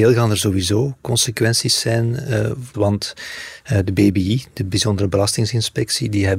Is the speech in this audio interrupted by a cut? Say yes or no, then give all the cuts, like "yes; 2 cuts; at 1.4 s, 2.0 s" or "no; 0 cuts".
yes; 1 cut; at 2.7 s